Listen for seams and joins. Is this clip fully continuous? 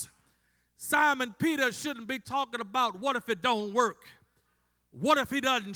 yes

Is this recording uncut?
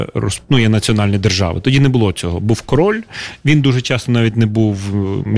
yes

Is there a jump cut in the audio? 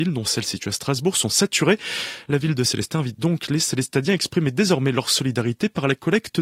no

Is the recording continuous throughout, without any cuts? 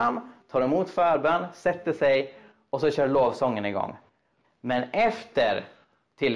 no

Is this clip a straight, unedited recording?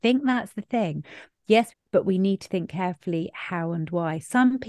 no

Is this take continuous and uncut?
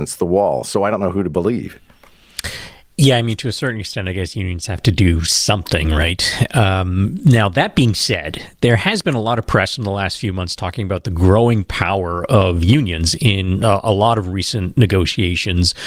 yes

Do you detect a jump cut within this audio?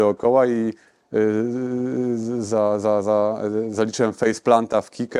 no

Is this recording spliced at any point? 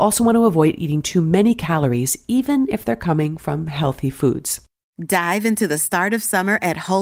no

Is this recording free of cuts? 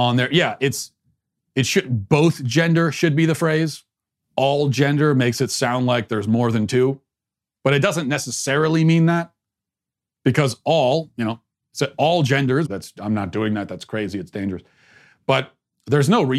no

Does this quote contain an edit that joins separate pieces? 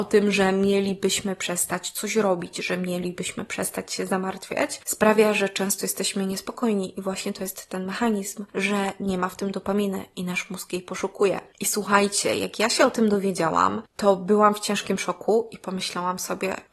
no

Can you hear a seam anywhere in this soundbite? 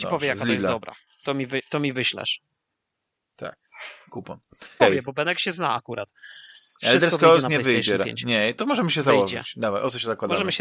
yes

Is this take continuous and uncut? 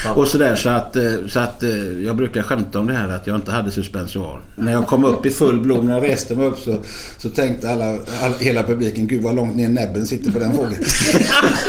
no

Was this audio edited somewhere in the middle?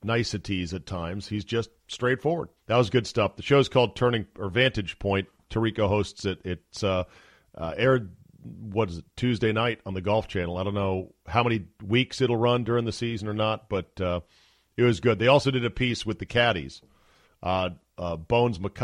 yes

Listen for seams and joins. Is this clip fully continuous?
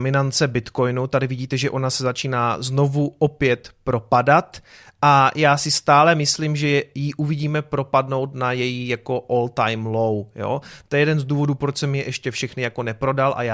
no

